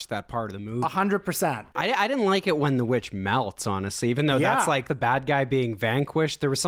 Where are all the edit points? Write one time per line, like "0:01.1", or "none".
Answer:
0:01.7